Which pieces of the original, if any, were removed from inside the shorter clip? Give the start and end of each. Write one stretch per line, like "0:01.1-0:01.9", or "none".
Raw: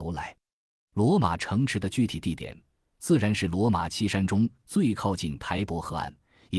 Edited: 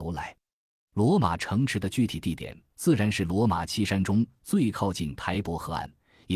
0:02.7-0:02.9